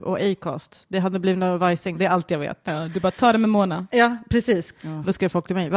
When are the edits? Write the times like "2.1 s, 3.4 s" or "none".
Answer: 1.9 s, 4.7 s